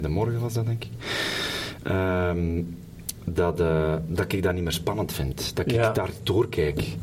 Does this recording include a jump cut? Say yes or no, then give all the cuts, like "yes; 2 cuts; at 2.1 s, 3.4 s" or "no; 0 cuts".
no; 0 cuts